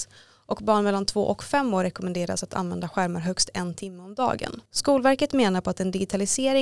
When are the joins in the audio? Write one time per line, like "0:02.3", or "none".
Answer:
0:04.7

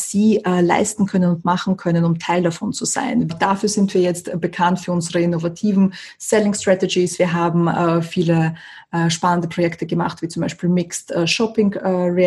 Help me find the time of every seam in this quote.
0:03.3

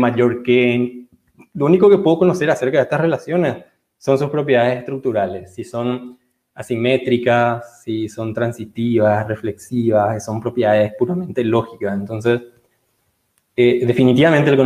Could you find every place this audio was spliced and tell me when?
none

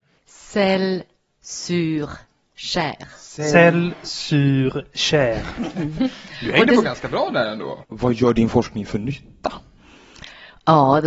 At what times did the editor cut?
0:07.8

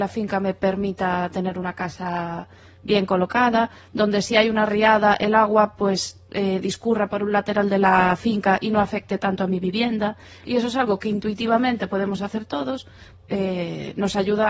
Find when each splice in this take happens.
0:10.4
0:13.1

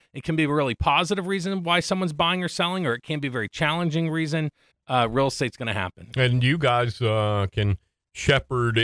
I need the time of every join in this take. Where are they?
0:04.7

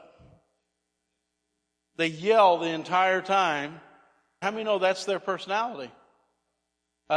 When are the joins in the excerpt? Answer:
0:04.4

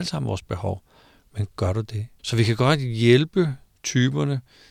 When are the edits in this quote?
0:02.2

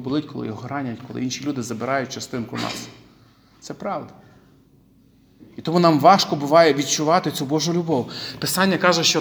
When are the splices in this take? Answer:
none

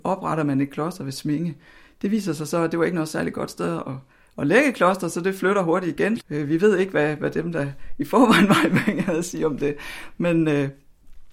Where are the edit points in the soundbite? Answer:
0:06.2

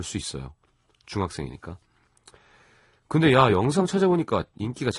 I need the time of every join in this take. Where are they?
none

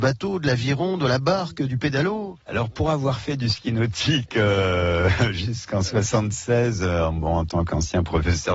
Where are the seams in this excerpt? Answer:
none

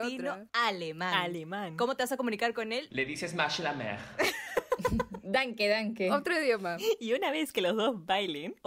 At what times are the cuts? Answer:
0:02.9

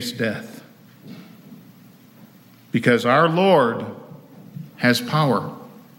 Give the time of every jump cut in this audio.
0:04.7

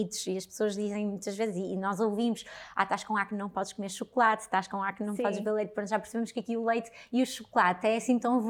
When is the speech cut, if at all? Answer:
none

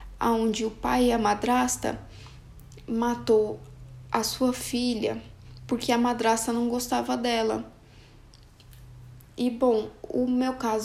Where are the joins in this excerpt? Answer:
none

